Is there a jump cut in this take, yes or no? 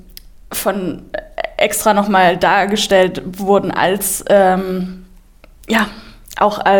no